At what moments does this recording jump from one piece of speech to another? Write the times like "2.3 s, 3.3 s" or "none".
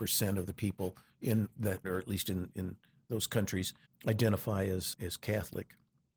1.8 s, 3.8 s, 4.9 s